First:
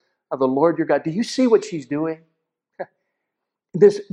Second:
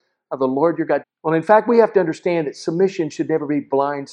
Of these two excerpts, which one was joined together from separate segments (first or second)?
second